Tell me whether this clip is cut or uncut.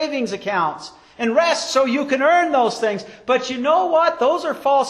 uncut